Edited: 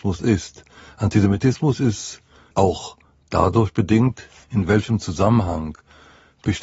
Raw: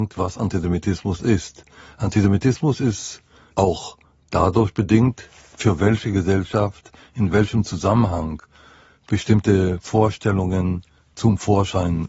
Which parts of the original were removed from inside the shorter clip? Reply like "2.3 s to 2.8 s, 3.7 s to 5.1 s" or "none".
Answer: 5.4 s to 7.1 s